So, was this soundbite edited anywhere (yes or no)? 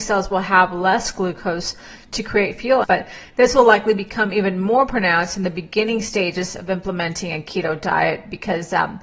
yes